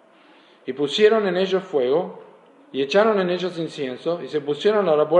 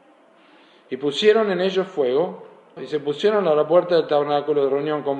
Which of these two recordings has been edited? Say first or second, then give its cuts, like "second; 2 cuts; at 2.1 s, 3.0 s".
second; 1 cut; at 2.8 s